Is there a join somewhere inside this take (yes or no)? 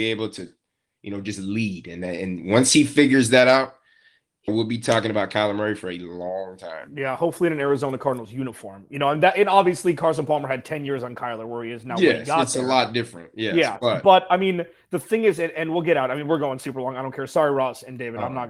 yes